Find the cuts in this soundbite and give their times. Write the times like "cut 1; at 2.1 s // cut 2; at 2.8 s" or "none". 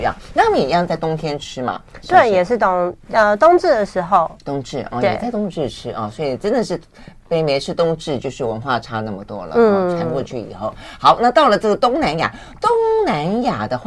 none